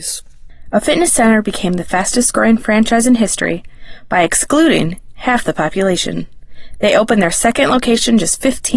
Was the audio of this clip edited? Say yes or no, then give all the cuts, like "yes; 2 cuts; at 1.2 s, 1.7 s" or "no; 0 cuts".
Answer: no; 0 cuts